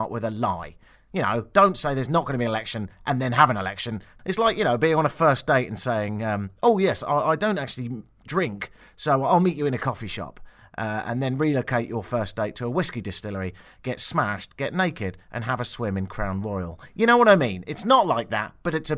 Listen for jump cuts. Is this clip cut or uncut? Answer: uncut